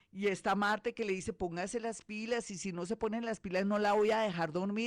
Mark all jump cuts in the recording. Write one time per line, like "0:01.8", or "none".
none